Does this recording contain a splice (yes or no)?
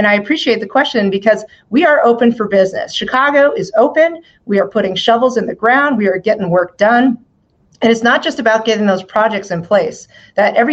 no